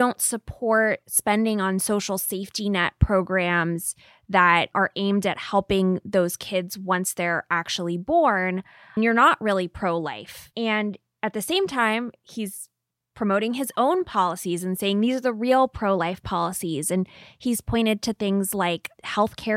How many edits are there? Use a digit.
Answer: 1